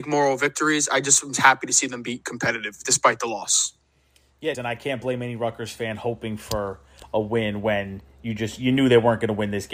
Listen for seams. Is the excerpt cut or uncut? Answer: cut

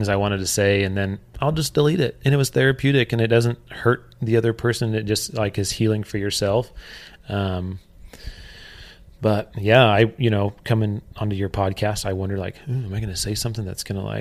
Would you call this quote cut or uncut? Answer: uncut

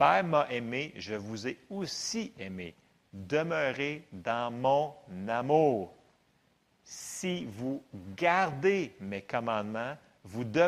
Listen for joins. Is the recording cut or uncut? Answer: uncut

